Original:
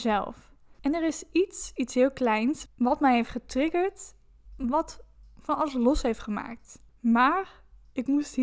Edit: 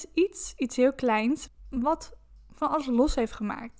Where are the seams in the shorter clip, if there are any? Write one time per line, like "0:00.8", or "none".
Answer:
0:01.5

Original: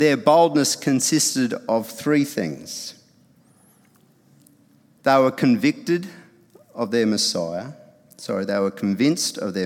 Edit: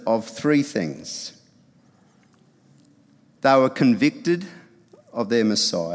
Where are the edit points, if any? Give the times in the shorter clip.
none

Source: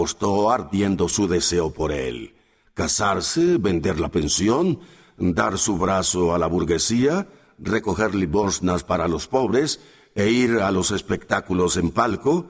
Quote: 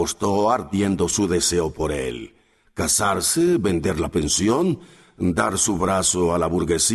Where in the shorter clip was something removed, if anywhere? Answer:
none

